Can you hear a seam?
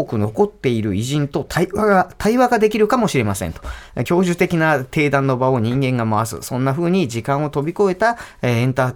no; 0 cuts

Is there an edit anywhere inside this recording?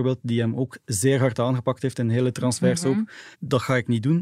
yes; 1 cut; at 3.3 s

